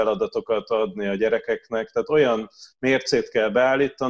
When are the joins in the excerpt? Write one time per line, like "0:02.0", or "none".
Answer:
none